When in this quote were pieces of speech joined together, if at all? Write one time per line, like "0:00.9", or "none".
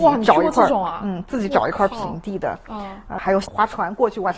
0:03.2